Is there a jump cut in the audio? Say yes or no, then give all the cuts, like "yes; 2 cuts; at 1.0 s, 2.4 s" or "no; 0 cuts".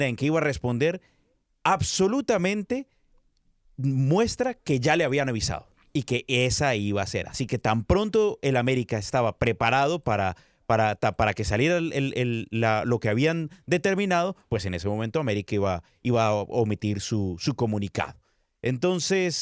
no; 0 cuts